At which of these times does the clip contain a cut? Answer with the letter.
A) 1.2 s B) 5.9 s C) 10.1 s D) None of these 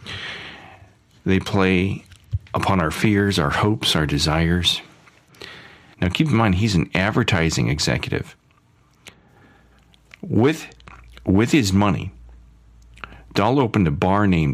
B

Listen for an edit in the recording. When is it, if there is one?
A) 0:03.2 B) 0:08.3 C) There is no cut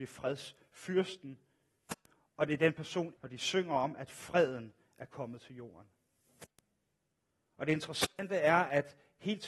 A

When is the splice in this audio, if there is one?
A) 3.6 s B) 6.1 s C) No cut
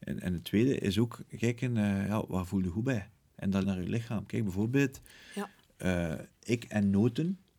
A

